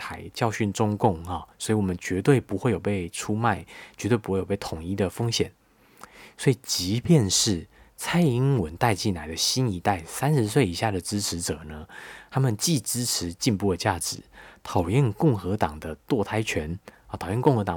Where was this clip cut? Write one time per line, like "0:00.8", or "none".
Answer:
none